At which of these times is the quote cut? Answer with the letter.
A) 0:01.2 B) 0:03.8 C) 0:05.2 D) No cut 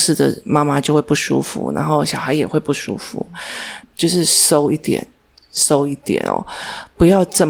B